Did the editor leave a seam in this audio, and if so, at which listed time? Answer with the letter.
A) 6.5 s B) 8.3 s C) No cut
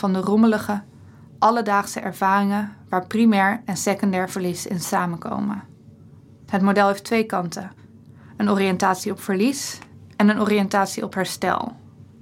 A